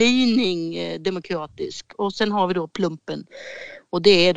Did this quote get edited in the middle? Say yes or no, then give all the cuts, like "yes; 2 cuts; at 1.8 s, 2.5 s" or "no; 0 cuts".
no; 0 cuts